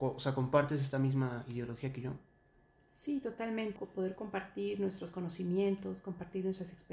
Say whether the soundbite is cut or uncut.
cut